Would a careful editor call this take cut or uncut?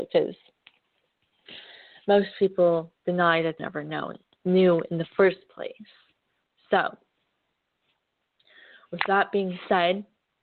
cut